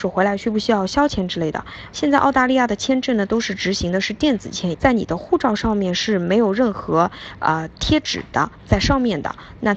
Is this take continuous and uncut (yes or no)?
no